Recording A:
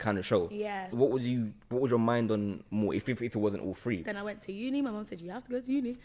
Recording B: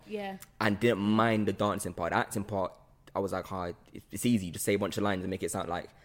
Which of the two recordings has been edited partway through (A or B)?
A